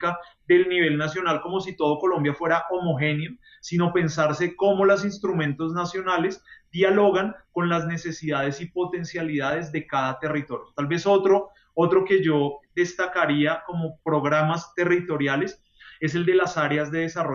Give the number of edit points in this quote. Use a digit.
1